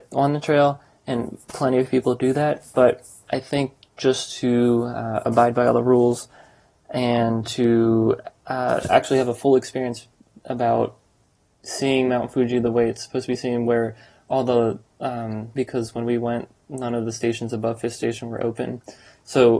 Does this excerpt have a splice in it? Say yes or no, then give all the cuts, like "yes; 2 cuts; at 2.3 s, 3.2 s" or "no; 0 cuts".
yes; 1 cut; at 15.5 s